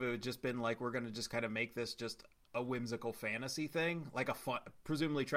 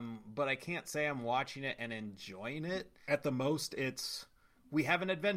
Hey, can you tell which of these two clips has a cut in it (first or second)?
second